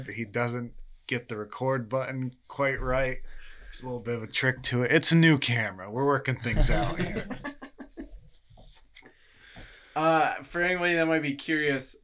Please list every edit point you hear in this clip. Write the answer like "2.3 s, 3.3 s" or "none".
none